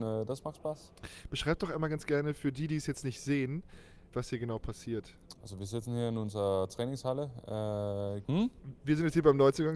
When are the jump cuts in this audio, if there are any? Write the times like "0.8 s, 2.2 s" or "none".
4.1 s, 8.2 s

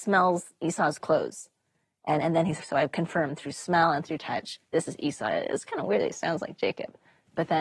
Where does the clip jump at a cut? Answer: 2.6 s

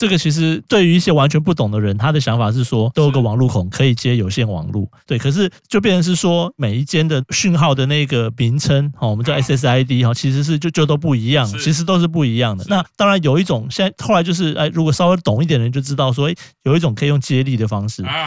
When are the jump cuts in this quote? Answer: 2.9 s, 5.1 s

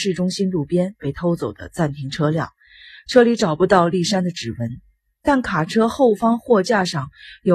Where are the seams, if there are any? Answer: none

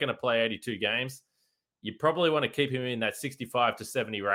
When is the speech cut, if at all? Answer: none

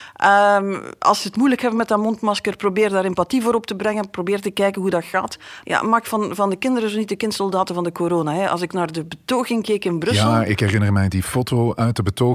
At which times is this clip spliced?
5.6 s

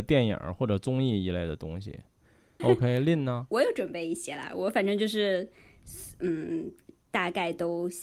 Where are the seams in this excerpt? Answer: 2.6 s

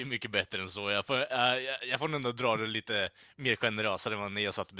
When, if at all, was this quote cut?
none

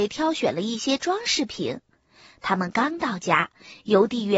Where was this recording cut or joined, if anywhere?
none

